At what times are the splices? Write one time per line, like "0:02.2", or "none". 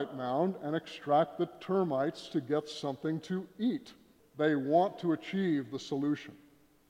0:04.2